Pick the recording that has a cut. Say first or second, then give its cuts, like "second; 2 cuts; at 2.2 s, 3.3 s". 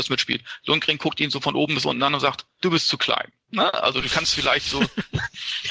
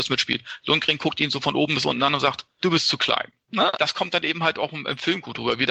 second; 1 cut; at 3.7 s